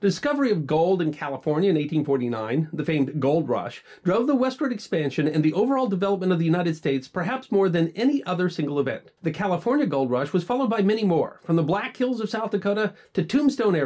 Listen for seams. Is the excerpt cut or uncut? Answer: cut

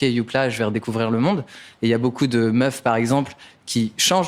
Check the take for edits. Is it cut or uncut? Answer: uncut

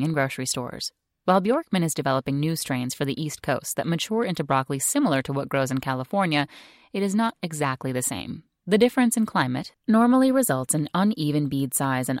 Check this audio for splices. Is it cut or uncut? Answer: cut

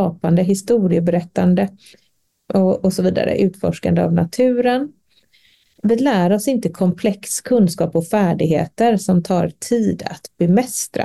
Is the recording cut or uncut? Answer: uncut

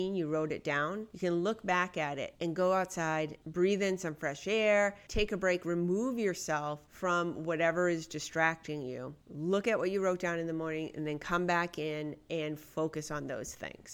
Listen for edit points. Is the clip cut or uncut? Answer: uncut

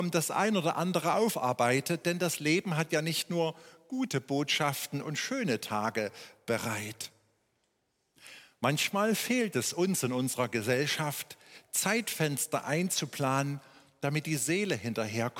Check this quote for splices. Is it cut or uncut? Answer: uncut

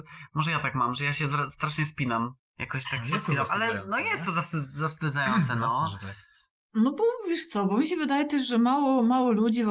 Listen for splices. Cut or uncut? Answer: uncut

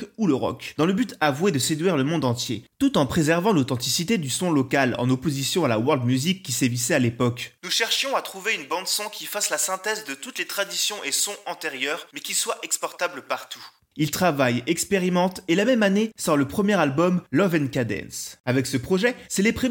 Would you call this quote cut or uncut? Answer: uncut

